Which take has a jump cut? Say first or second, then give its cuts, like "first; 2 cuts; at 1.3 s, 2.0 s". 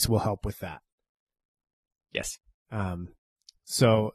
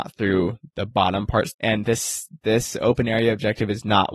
second; 1 cut; at 1.5 s